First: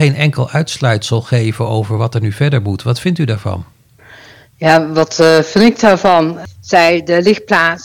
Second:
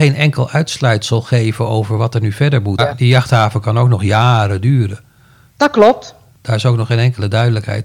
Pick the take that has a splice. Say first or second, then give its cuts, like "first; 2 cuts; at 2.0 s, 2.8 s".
second; 1 cut; at 2.8 s